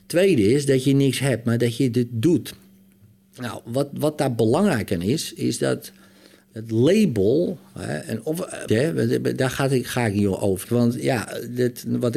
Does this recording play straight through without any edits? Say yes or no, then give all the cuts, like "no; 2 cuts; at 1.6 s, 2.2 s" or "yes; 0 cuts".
no; 2 cuts; at 8.7 s, 10.6 s